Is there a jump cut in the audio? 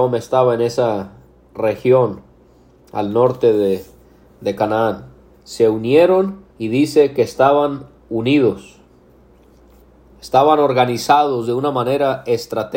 yes; 2 cuts; at 5.3 s, 6.5 s

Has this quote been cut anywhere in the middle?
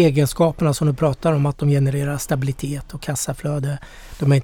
no; 0 cuts

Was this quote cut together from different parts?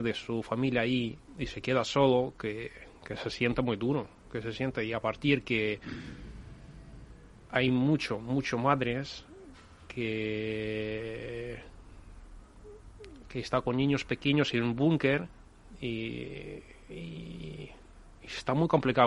no; 0 cuts

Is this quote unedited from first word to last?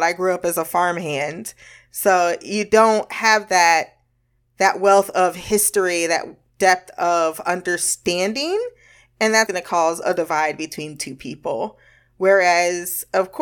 no; 1 cut; at 9.5 s

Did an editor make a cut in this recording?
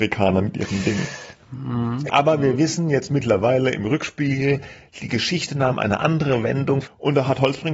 yes; 2 cuts; at 2.1 s, 6.8 s

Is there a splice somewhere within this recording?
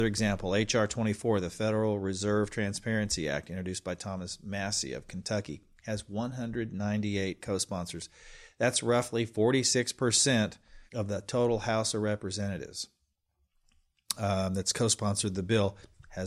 yes; 1 cut; at 10.9 s

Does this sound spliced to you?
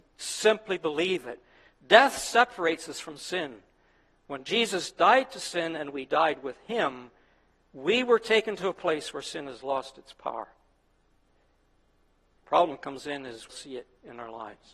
yes; 1 cut; at 13.5 s

